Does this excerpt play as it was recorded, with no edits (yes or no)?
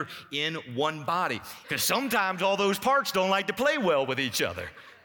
no